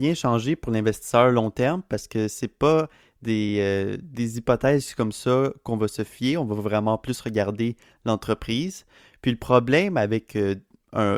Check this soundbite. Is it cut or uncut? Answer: uncut